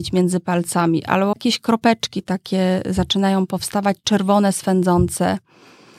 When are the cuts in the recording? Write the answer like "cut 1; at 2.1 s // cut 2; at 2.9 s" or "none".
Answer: cut 1; at 1.3 s